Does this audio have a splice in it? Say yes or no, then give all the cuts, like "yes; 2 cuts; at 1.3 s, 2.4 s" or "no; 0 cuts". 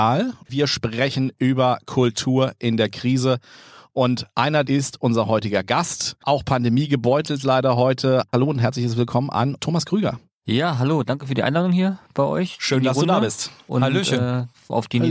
yes; 1 cut; at 4.6 s